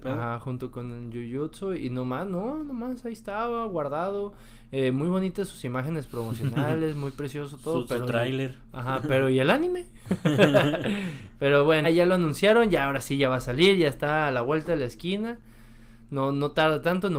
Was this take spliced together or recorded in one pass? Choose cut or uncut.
cut